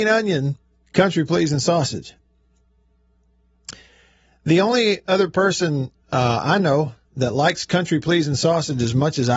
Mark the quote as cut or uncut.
uncut